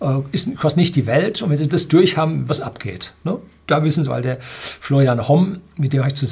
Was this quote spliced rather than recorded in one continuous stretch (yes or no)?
yes